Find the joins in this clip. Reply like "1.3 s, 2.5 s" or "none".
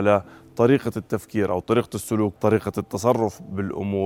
2.4 s